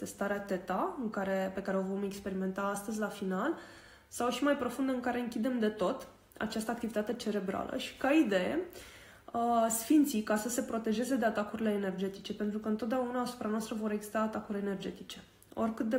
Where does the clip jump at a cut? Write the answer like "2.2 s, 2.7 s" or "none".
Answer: none